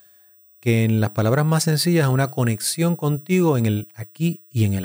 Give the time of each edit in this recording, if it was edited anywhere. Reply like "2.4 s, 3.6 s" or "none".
none